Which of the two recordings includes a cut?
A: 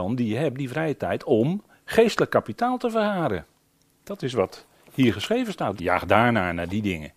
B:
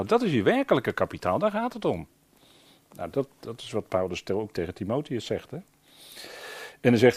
A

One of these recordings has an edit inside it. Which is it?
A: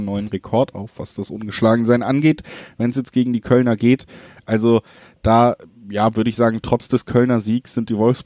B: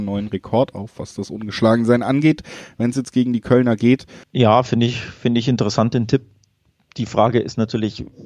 B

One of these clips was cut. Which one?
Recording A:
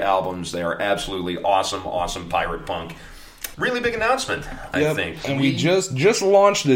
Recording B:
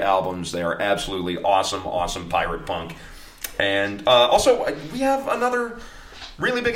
A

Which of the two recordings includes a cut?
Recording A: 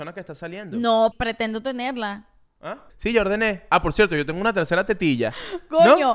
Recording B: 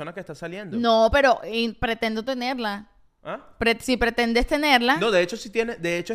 A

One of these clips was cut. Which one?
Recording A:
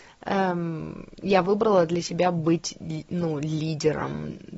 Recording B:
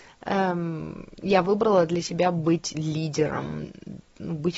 B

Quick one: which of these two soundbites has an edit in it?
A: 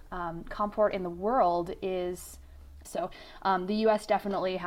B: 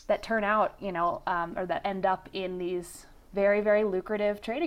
A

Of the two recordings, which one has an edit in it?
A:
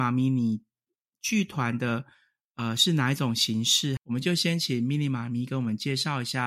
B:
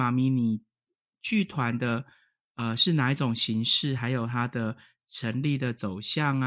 A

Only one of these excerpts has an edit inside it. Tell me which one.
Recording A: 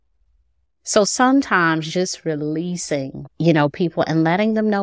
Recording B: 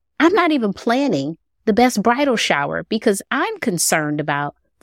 A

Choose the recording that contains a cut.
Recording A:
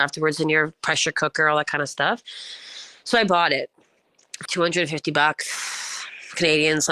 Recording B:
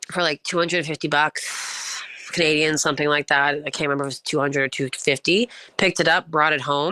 A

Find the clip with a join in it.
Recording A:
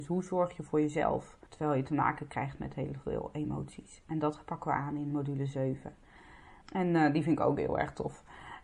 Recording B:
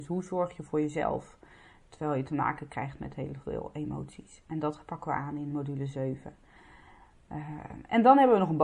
A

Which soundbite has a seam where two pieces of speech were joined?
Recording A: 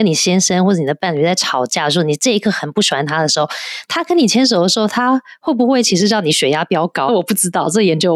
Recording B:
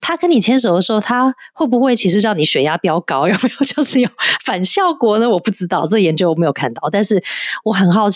A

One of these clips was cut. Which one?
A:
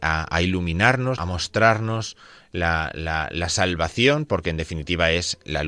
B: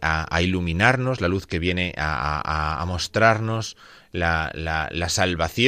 A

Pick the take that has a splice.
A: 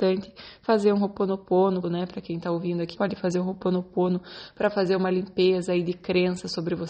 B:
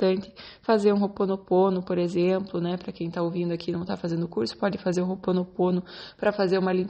A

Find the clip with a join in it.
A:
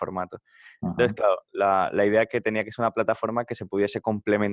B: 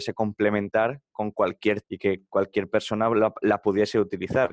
B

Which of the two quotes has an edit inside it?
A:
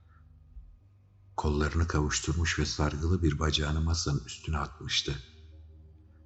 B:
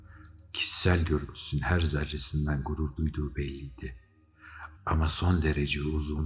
B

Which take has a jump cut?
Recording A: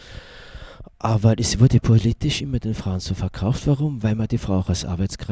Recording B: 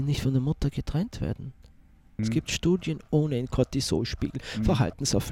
B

